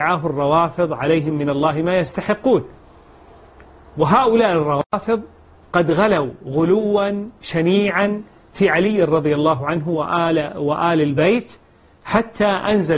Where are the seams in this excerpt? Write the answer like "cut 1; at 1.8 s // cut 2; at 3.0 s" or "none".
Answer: none